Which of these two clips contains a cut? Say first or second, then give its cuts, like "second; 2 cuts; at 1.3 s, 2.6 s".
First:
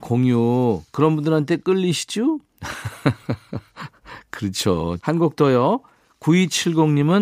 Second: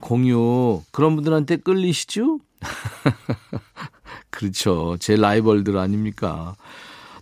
first; 1 cut; at 5.0 s